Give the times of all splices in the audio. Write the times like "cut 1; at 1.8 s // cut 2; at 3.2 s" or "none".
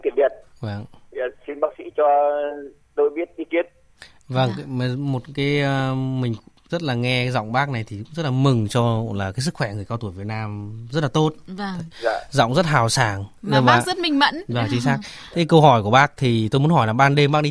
none